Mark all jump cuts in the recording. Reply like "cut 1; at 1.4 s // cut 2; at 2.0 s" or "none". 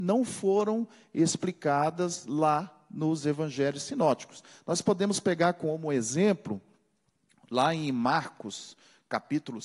none